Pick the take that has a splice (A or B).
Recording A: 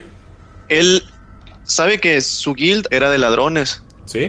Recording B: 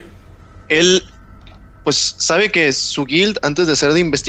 A